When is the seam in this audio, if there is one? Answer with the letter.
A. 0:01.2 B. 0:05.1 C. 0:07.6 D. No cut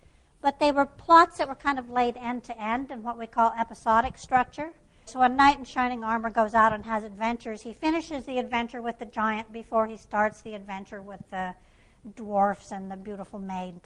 B